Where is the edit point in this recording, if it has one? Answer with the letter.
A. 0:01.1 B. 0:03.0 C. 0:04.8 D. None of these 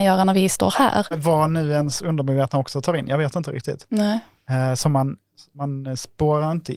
A